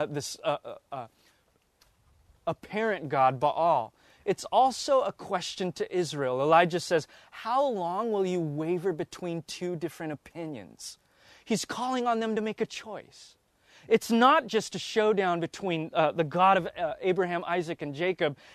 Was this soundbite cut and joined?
no; 0 cuts

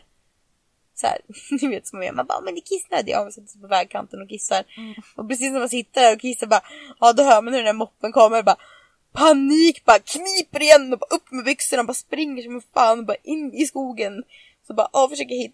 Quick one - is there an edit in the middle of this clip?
no; 0 cuts

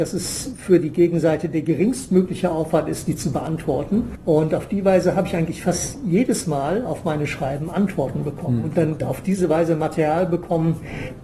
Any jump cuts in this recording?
no; 0 cuts

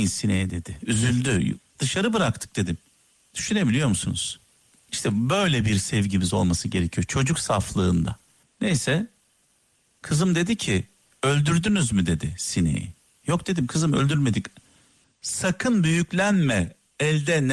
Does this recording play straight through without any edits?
no; 3 cuts; at 1.6 s, 8.4 s, 15.0 s

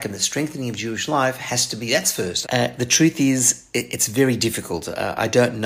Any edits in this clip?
yes; 1 cut; at 2.4 s

